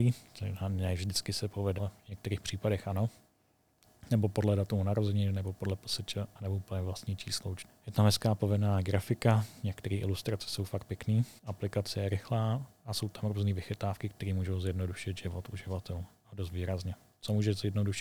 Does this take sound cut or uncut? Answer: cut